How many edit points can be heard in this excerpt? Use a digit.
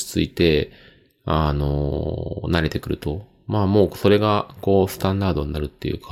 0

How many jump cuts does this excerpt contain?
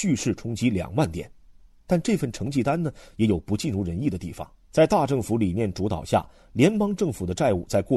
1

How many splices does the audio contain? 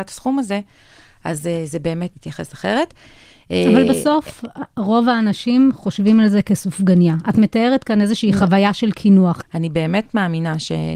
2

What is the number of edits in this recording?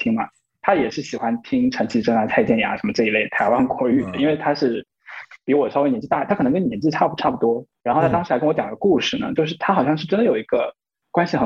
0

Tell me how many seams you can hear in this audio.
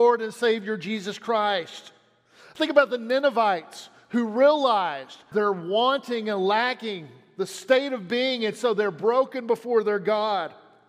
1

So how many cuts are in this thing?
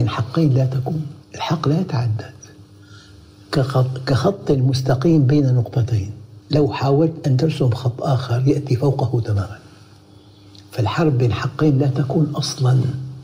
2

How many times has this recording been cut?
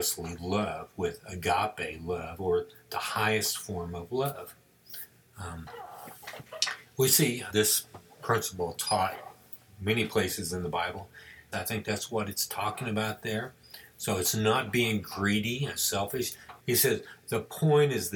3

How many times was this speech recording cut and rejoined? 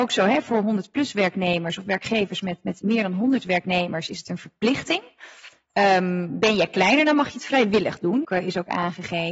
1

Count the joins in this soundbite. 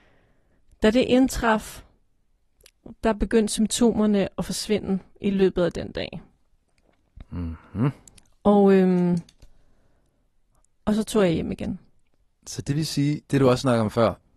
1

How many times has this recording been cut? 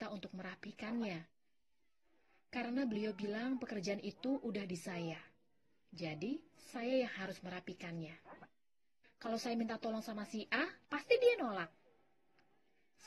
2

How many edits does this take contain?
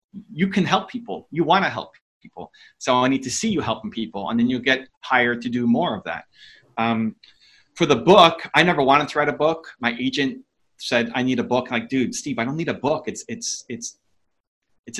0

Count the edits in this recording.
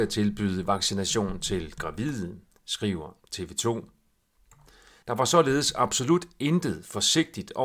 1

